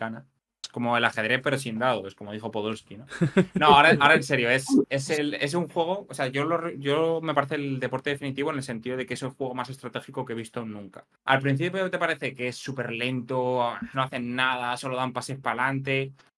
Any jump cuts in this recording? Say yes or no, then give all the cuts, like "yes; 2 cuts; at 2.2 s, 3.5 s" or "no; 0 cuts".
yes; 2 cuts; at 11.2 s, 13.9 s